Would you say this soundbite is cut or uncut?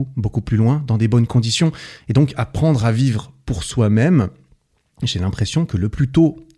uncut